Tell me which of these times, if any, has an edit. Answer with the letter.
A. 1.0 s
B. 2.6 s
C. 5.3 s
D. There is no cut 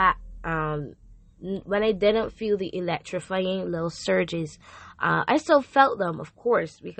D